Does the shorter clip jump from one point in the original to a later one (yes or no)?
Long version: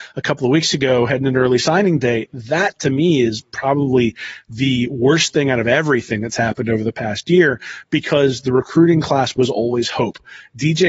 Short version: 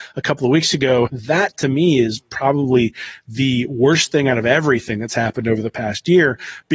yes